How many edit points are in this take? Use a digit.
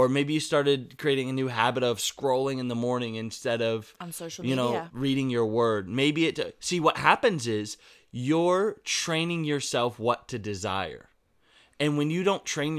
1